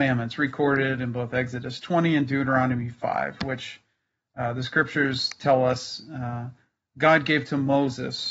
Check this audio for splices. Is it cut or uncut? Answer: uncut